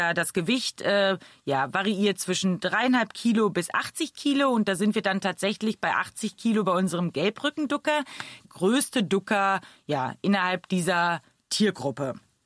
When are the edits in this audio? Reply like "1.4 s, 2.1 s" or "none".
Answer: 8.4 s